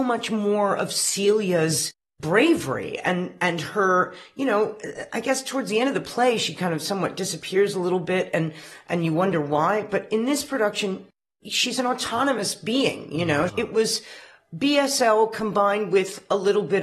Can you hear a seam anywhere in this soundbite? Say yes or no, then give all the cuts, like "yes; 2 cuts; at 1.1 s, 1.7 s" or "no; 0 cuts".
yes; 1 cut; at 13.5 s